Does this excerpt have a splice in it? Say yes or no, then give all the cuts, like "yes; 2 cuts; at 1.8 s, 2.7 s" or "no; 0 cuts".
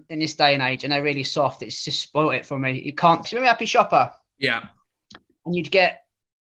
yes; 1 cut; at 3.2 s